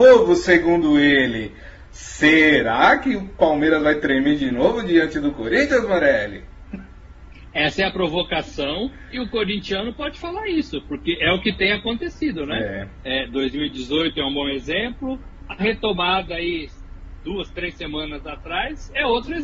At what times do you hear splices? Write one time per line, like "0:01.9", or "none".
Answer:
none

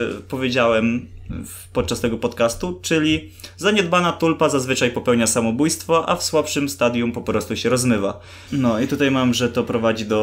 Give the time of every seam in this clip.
0:08.5

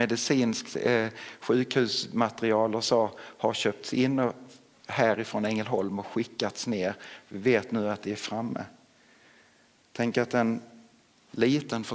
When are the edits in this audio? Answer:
none

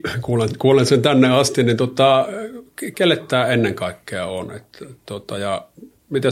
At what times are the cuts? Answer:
0:02.9

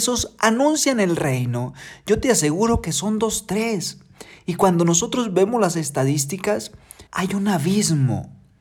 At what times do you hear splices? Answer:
0:07.1

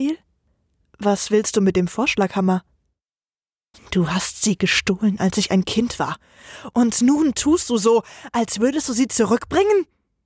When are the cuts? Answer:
0:03.7

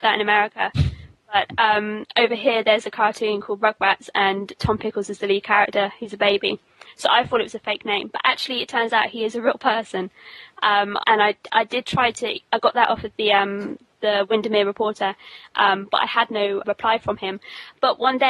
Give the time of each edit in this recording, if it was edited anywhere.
0:11.0
0:15.5
0:16.6

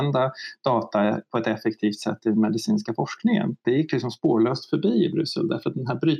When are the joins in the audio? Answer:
0:03.6

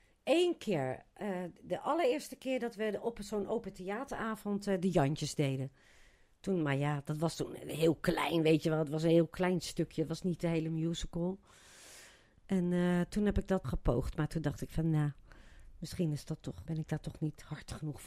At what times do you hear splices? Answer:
0:13.6
0:16.7

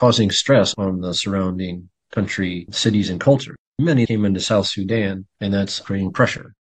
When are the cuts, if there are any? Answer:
0:05.8

